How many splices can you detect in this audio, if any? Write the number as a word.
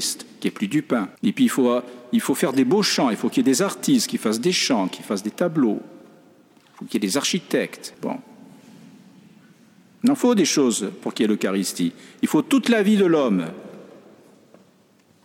two